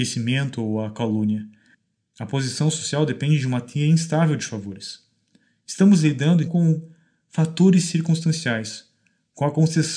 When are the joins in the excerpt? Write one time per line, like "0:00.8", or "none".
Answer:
0:06.5